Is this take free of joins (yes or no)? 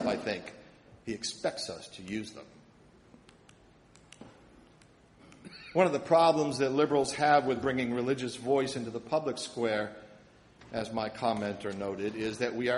no